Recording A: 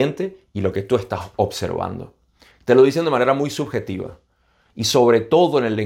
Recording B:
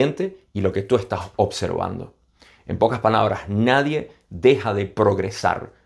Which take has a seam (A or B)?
A